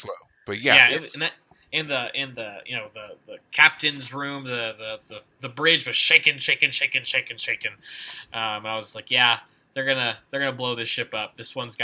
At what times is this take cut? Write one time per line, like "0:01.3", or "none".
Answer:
none